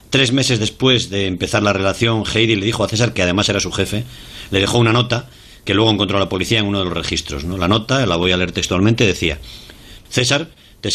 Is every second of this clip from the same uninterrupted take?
yes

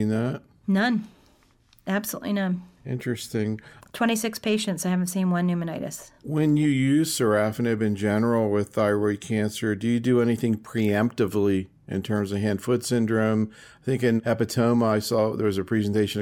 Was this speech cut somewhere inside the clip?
no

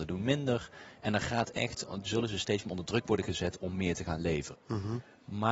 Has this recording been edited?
yes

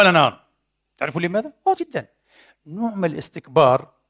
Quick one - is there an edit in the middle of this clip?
yes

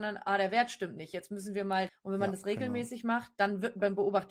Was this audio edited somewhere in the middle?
yes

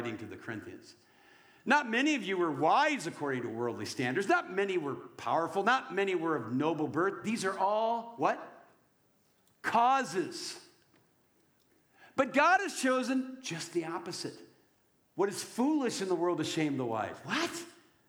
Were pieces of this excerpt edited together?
no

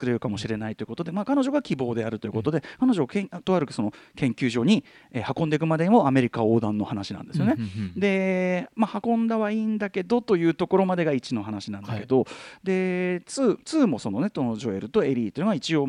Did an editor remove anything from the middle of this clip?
no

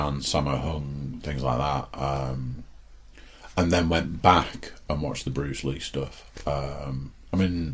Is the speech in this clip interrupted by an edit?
no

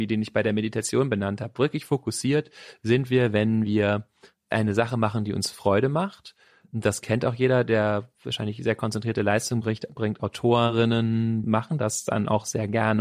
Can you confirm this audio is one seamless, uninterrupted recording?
no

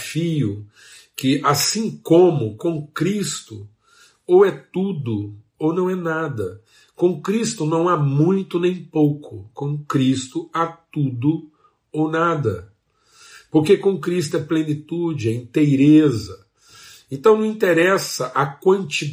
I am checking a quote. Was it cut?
no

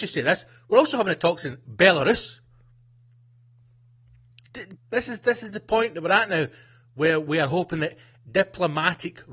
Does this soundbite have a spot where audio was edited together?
yes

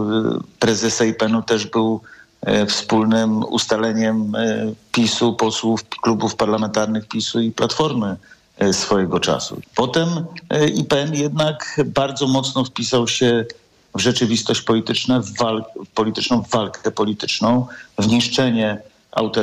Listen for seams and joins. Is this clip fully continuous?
no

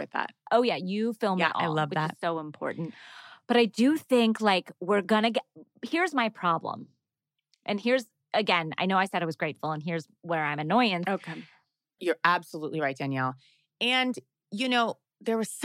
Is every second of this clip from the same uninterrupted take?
no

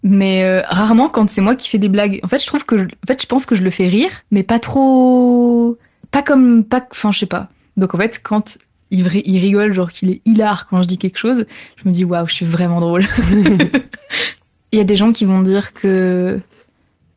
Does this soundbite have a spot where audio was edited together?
yes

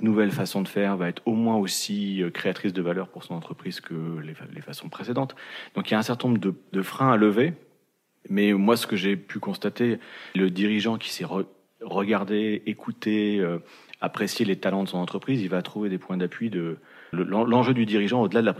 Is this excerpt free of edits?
no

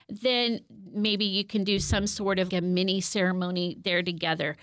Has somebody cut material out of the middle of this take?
yes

